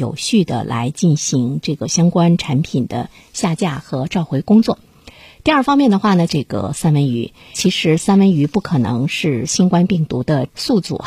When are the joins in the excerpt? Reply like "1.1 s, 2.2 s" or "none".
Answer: 6.3 s